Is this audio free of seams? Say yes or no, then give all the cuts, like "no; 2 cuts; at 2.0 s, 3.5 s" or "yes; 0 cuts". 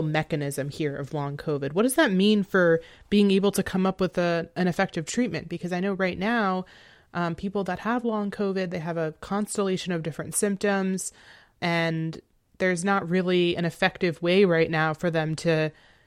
yes; 0 cuts